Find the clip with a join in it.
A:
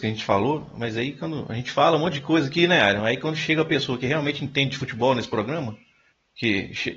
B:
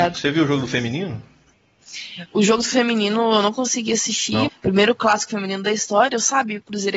B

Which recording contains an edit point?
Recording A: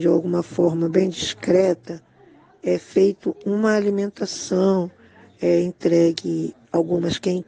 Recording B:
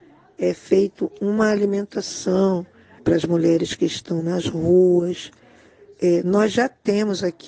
B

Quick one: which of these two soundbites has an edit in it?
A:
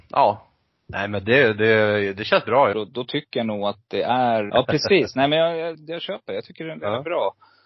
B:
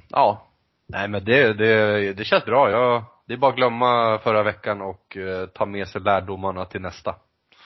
A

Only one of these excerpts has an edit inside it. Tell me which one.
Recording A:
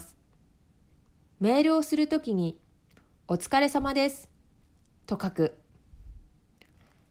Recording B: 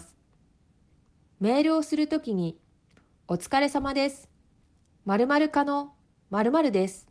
A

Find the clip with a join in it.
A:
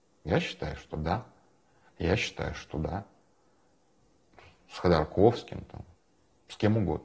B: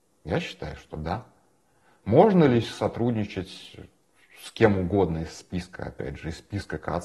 A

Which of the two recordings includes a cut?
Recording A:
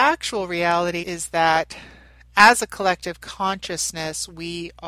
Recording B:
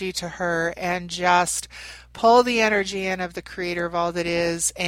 A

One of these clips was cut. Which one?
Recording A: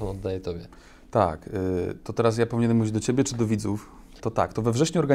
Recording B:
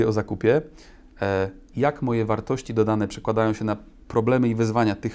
A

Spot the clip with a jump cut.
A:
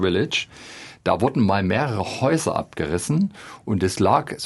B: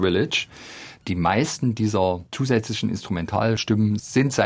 B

